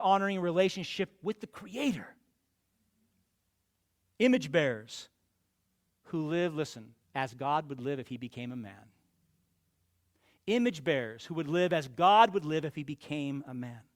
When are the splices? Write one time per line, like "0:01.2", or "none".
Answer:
0:07.0